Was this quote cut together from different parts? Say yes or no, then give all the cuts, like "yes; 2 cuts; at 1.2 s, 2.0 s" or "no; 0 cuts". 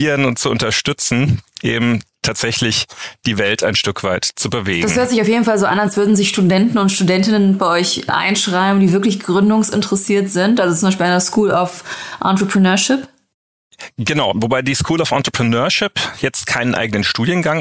no; 0 cuts